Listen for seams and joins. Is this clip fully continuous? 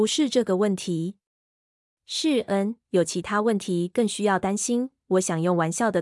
no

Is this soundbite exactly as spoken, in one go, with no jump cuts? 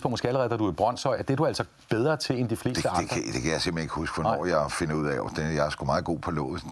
yes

